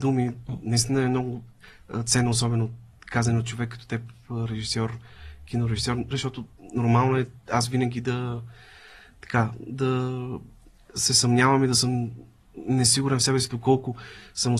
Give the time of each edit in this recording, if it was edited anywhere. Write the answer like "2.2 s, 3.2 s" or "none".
6.1 s